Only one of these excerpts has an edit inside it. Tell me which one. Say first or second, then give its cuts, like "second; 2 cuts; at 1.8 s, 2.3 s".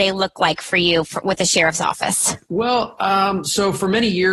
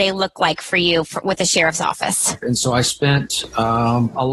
second; 1 cut; at 2.4 s